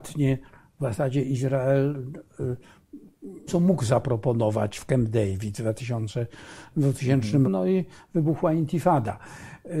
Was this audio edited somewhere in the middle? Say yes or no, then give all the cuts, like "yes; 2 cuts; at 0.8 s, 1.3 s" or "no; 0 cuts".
yes; 2 cuts; at 3.5 s, 7.4 s